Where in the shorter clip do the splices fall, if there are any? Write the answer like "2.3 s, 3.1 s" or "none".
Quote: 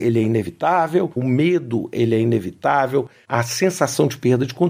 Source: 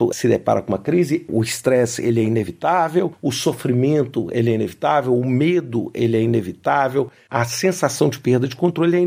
1.2 s